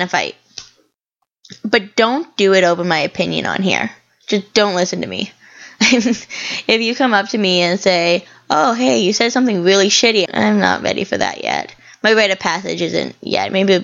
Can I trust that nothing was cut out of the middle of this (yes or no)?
no